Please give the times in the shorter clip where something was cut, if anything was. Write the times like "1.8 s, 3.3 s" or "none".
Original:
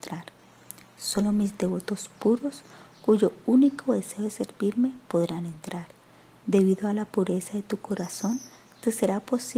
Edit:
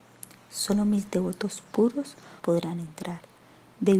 2.4 s